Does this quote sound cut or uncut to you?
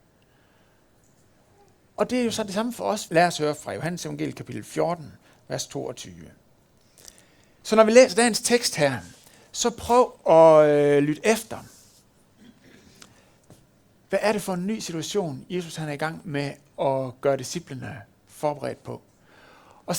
cut